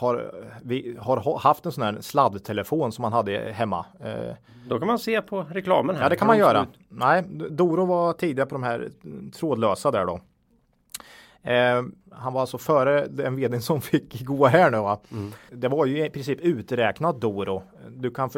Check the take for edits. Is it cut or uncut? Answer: cut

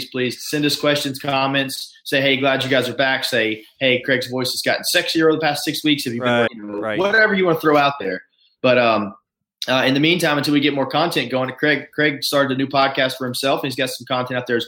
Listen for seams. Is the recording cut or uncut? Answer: cut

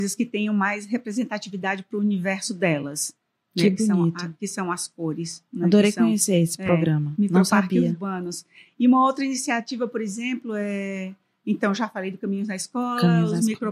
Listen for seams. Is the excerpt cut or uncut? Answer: uncut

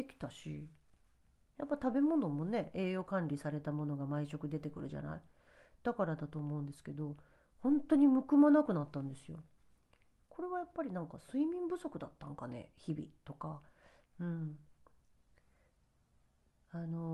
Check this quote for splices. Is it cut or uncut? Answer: cut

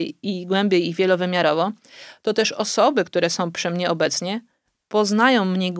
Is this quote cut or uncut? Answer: uncut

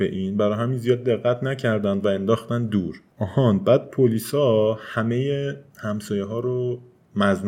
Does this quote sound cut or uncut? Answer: uncut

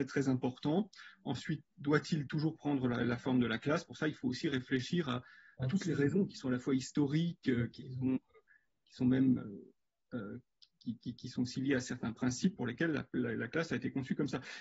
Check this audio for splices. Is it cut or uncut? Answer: uncut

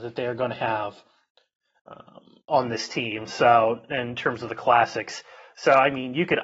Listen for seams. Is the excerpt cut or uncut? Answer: uncut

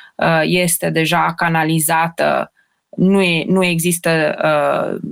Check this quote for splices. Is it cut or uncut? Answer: uncut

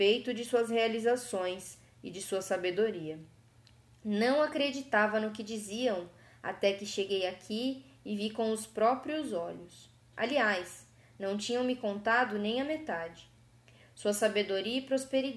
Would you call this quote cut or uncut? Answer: cut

